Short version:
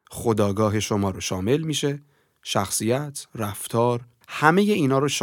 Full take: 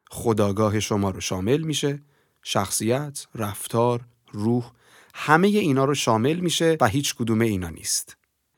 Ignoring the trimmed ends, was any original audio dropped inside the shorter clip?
yes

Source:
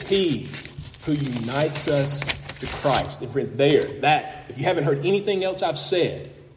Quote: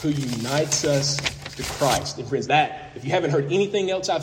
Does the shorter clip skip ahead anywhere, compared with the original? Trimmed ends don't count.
yes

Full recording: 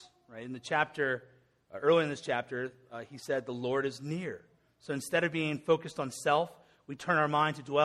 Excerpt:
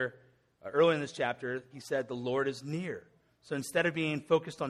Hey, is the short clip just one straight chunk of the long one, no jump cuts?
no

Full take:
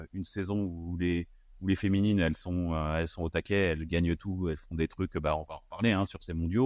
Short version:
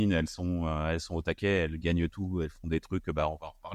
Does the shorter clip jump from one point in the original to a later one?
no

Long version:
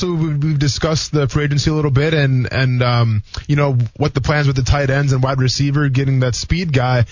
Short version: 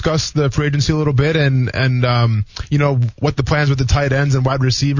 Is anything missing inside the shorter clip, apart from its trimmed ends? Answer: no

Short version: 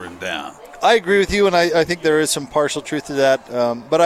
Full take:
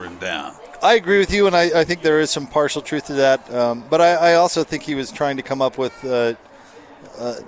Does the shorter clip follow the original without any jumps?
yes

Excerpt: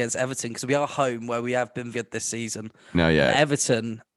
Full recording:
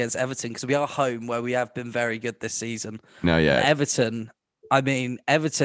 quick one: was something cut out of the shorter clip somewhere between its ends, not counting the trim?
yes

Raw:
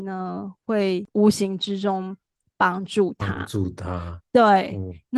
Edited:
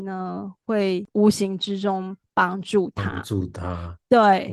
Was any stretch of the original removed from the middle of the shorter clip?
yes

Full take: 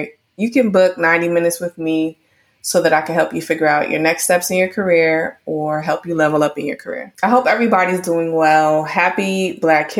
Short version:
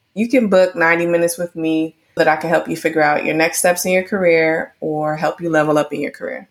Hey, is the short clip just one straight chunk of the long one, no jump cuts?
no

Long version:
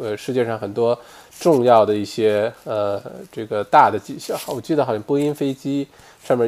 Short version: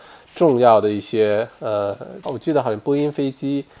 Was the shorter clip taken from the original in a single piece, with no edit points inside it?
no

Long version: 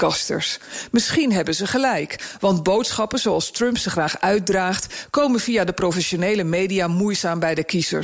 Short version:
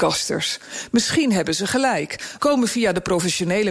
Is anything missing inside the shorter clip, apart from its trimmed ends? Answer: yes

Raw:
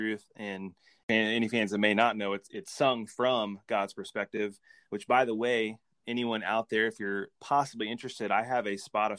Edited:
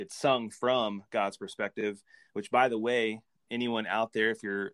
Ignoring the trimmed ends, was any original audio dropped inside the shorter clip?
no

